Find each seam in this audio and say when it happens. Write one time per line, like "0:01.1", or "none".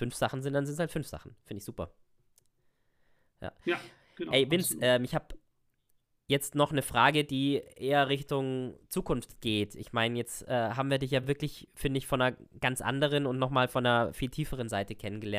none